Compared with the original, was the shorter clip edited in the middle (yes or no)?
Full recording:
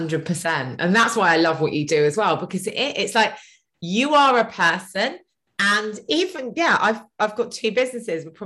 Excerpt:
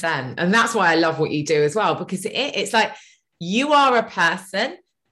no